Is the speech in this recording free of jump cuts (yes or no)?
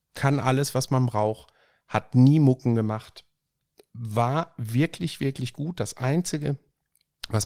yes